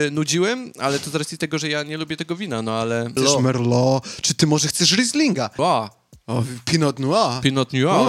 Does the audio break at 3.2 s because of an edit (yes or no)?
yes